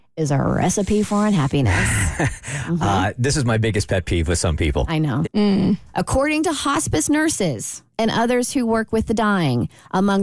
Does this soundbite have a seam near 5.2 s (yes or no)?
yes